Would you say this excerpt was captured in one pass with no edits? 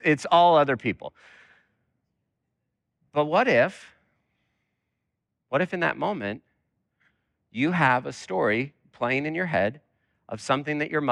yes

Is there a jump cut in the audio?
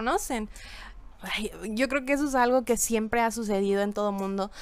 yes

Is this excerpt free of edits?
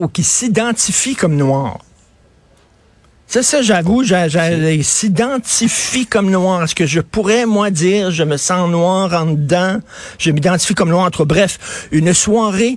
yes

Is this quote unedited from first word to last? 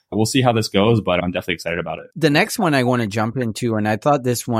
no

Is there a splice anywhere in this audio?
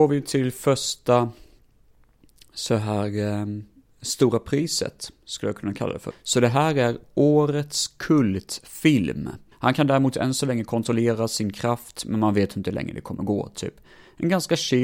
yes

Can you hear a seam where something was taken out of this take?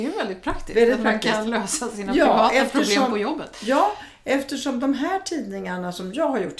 no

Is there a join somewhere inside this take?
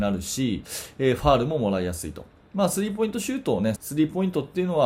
yes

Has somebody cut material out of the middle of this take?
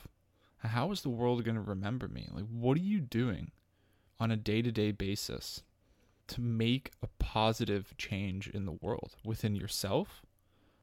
no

